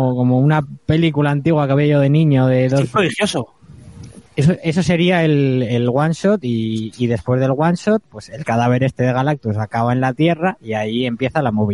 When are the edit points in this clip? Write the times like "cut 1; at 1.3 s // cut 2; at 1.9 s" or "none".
cut 1; at 4.3 s